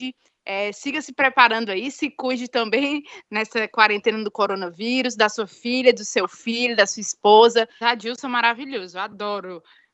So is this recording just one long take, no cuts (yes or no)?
no